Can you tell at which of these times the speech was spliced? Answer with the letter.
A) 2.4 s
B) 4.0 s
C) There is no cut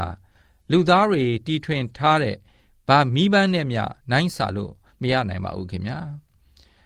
B